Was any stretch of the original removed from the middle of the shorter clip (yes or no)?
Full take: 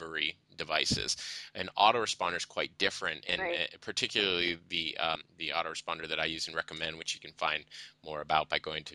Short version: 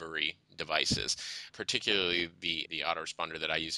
yes